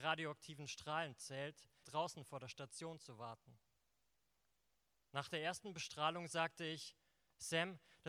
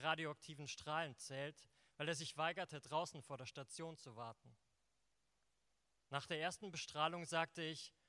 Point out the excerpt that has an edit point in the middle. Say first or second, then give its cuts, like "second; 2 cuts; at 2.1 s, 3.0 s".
first; 1 cut; at 1.8 s